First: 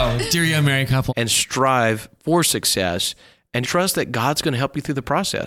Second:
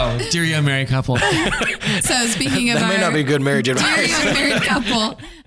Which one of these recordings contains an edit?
first; 2 cuts; at 1.1 s, 3.6 s

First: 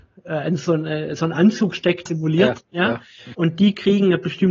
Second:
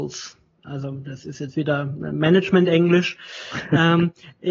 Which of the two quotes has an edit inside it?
first; 2 cuts; at 2.1 s, 3.3 s

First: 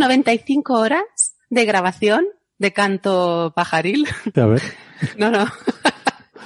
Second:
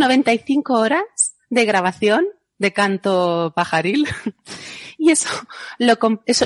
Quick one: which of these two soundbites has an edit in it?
first; 1 cut; at 4.3 s

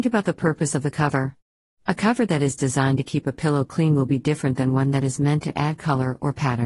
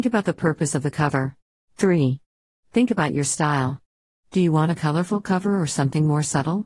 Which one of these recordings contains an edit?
second; 1 cut; at 1.6 s

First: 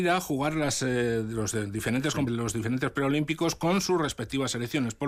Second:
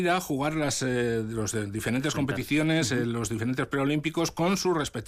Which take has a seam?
first; 1 cut; at 2.3 s

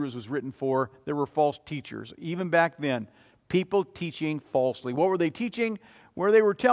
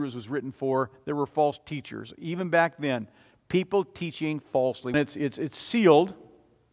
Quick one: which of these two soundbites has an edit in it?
second; 1 cut; at 4.9 s

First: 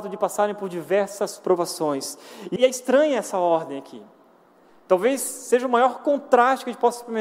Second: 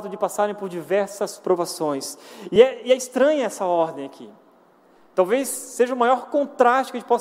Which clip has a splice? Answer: first; 1 cut; at 2.6 s

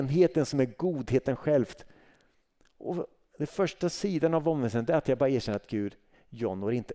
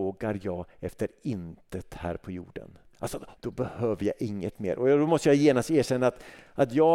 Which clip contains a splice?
second; 1 cut; at 3.3 s

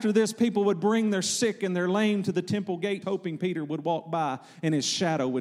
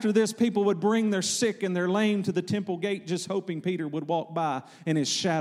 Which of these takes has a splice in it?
first; 1 cut; at 3.0 s

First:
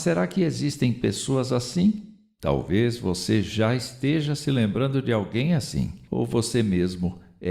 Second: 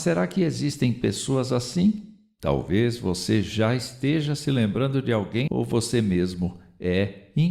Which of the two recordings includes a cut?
second; 1 cut; at 5.5 s

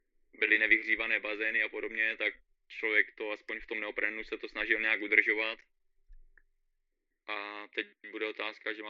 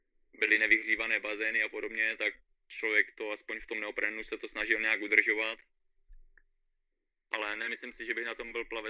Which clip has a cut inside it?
first; 1 cut; at 7.1 s

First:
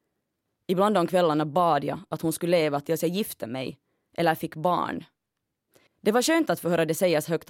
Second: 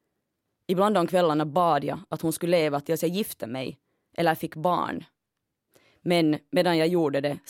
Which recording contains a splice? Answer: first; 1 cut; at 5.9 s

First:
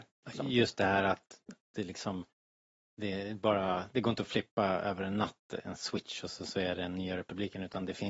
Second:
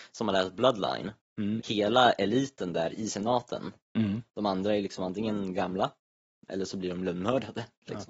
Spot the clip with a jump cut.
second; 2 cuts; at 1.6 s, 4.3 s

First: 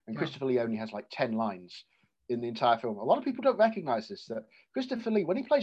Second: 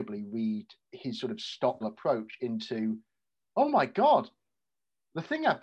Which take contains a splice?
second; 1 cut; at 1.8 s

